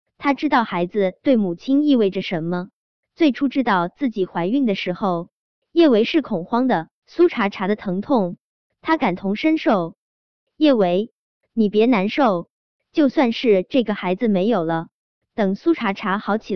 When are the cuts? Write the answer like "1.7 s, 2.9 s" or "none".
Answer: 7.0 s